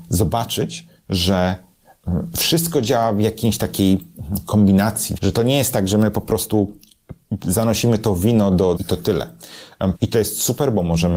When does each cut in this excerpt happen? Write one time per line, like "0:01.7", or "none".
0:05.2
0:08.8
0:10.0